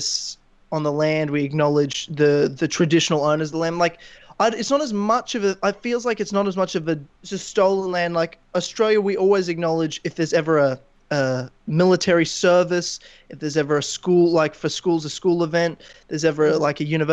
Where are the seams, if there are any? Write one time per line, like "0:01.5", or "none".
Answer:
0:07.1

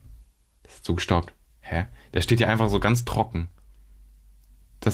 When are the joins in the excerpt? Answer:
none

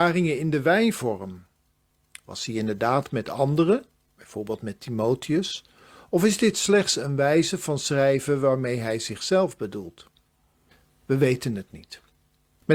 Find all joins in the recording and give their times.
none

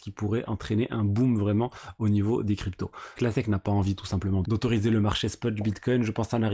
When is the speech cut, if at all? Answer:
0:03.2
0:04.4

